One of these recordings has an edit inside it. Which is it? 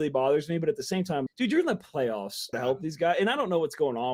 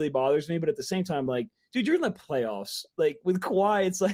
first; 2 cuts; at 1.3 s, 2.5 s

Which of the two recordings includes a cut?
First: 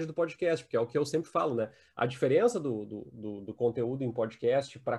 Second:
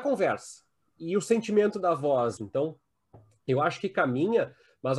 second; 1 cut; at 2.4 s

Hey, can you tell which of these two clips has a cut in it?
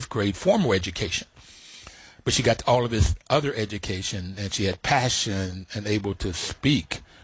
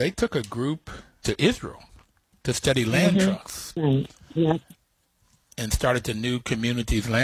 second; 1 cut; at 1.2 s

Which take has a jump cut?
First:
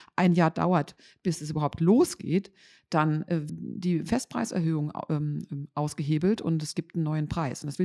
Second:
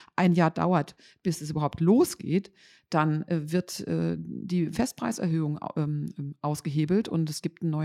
first; 1 cut; at 3.5 s

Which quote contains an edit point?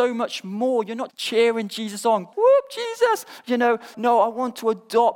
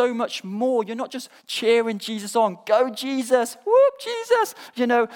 first; 3 cuts; at 1.1 s, 2.3 s, 3.9 s

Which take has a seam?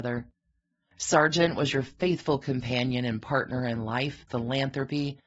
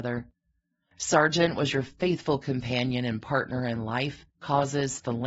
first; 1 cut; at 4.3 s

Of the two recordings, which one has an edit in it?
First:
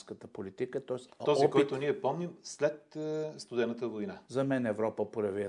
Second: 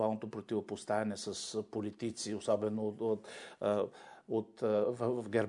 first; 2 cuts; at 1.1 s, 4.2 s

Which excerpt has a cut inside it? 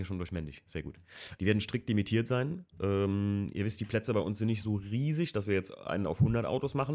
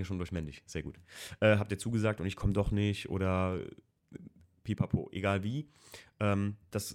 first; 1 cut; at 1.4 s

